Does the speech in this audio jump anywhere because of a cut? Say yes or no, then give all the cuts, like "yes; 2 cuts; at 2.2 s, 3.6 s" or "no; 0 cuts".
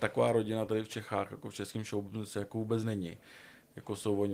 no; 0 cuts